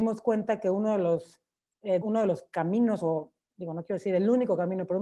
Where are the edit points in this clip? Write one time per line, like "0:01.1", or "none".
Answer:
0:02.0